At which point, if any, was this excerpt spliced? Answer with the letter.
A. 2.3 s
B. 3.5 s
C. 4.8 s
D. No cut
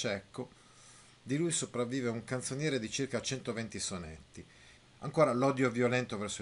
C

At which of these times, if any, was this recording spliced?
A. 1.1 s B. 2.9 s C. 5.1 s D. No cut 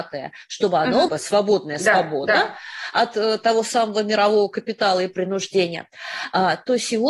A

